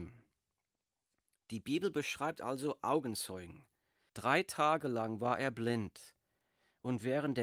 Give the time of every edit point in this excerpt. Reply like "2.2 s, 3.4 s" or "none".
4.1 s